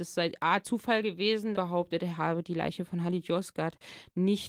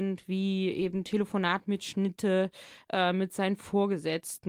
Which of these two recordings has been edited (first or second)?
first